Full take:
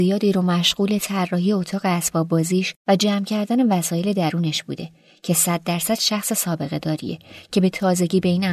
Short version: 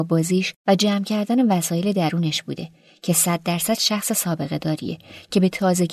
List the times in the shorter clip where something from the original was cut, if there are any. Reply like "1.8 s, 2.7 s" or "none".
none